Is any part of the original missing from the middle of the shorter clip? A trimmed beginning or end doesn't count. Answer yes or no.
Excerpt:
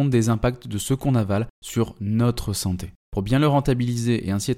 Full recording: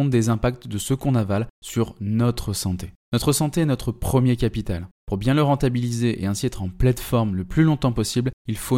yes